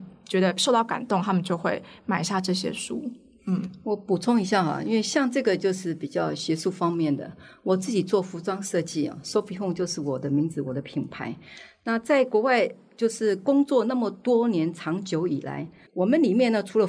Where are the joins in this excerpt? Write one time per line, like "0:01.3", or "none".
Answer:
0:15.9